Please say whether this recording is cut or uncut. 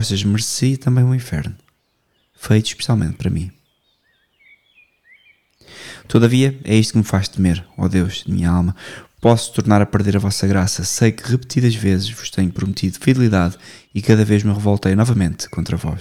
uncut